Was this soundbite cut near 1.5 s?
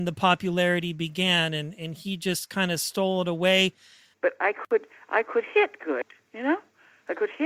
no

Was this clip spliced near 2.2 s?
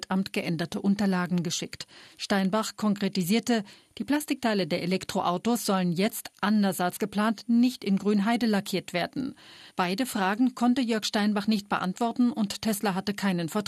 no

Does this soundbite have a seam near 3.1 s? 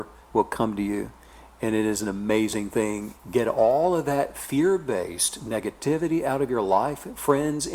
yes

